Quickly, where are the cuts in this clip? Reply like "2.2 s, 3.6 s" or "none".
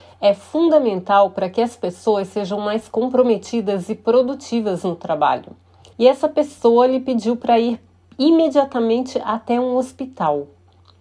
5.9 s